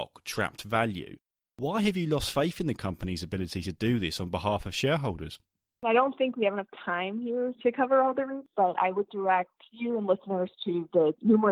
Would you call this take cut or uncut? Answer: uncut